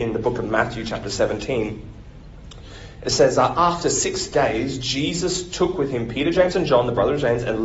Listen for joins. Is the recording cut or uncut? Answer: uncut